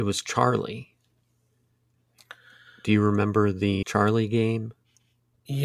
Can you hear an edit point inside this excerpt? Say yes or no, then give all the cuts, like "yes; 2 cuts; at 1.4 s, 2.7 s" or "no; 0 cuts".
yes; 1 cut; at 3.8 s